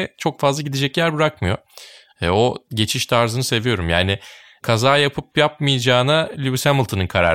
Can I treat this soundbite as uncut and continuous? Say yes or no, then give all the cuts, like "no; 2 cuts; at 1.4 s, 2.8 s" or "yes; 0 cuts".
yes; 0 cuts